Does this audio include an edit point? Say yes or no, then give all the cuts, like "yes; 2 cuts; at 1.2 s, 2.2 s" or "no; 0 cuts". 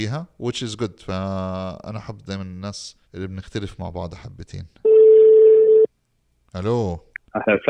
yes; 1 cut; at 3.0 s